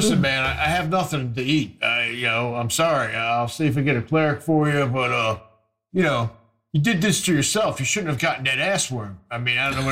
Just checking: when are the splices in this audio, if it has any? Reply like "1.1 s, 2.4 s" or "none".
none